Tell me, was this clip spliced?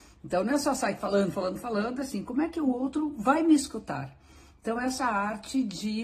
no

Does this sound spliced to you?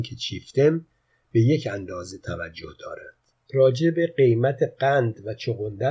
yes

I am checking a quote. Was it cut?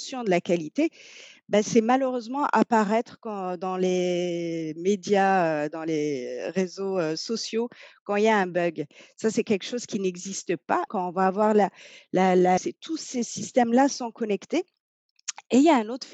yes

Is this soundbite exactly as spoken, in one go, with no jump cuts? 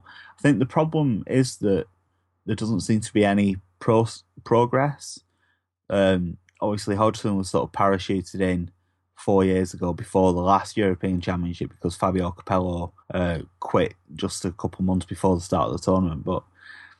no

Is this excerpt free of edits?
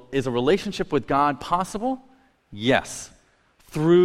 yes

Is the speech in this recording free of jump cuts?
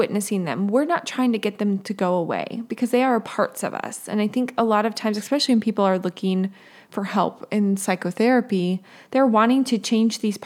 yes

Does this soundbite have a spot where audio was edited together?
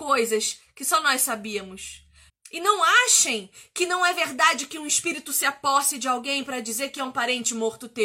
yes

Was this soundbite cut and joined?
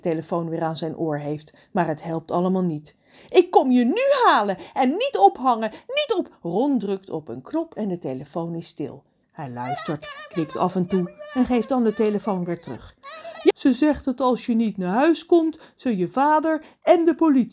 yes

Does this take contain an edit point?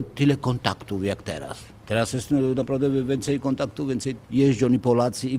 no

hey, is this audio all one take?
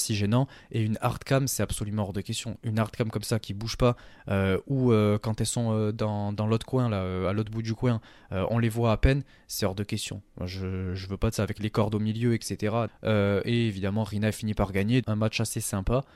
no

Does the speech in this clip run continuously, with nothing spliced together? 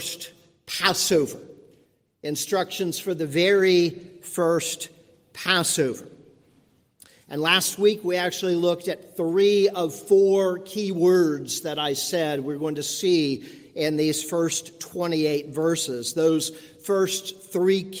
yes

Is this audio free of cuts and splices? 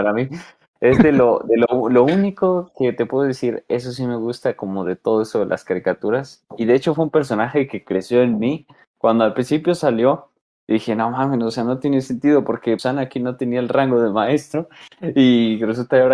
no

